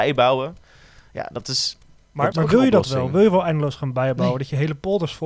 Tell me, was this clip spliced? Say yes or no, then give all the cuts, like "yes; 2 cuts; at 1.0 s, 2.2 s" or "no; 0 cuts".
yes; 1 cut; at 2.3 s